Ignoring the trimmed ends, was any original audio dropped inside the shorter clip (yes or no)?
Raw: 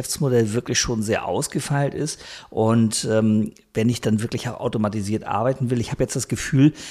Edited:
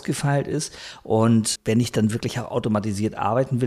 yes